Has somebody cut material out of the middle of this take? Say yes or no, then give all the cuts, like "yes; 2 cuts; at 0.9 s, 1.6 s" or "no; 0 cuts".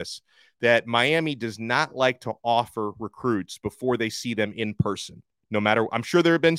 no; 0 cuts